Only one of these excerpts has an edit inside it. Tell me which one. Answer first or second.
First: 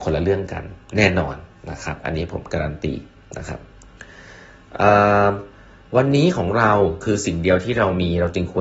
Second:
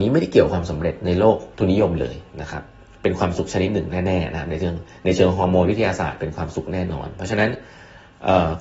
second